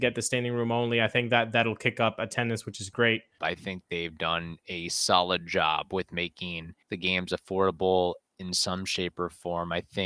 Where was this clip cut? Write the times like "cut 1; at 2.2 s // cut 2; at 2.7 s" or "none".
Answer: cut 1; at 3.4 s // cut 2; at 6.8 s